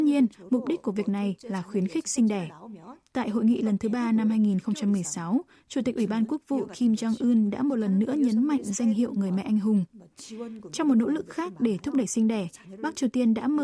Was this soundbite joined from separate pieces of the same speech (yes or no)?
no